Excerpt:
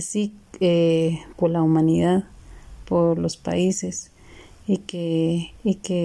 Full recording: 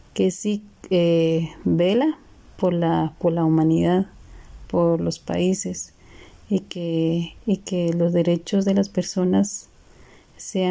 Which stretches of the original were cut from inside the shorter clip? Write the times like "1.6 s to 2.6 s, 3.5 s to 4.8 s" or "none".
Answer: 1.6 s to 3.2 s